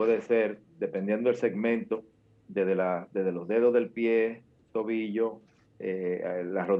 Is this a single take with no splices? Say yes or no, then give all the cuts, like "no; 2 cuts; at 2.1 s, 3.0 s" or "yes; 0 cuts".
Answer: yes; 0 cuts